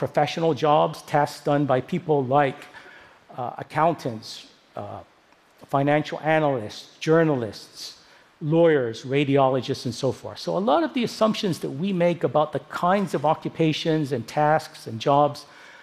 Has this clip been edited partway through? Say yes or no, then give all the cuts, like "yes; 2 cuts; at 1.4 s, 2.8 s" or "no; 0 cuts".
no; 0 cuts